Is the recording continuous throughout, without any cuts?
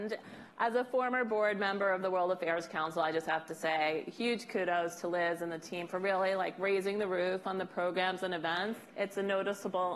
no; 1 cut; at 8.9 s

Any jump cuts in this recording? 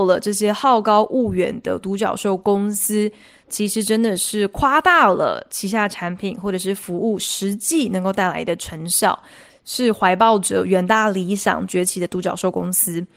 yes; 1 cut; at 9.5 s

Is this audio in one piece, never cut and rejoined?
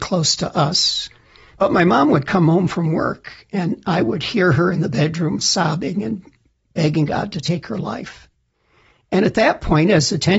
no; 1 cut; at 1.5 s

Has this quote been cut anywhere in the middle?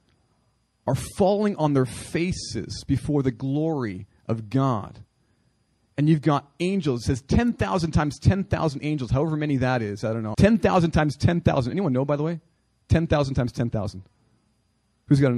yes; 1 cut; at 10.3 s

